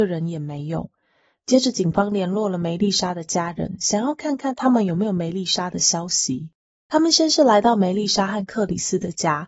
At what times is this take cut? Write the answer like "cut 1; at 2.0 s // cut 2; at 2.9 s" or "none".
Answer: cut 1; at 6.7 s